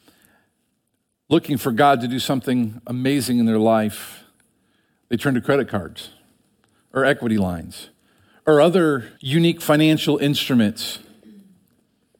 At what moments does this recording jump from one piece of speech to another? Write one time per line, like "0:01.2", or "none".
0:09.2